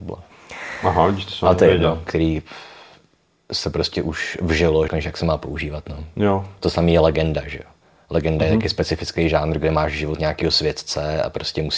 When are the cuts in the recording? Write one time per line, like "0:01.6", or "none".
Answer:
0:02.1
0:04.9